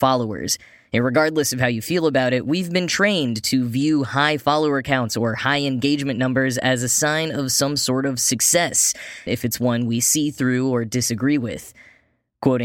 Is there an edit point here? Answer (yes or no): yes